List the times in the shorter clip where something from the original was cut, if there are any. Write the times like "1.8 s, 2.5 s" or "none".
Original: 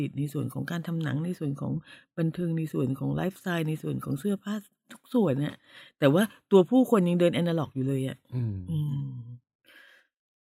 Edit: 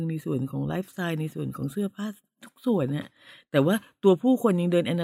none